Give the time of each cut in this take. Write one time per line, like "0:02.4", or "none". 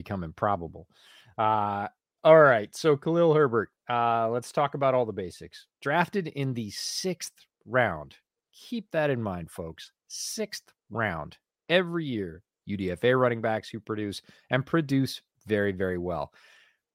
0:12.5